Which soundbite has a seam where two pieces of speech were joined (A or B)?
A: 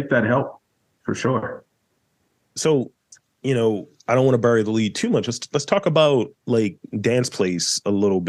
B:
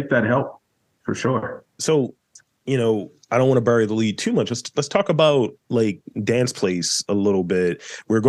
B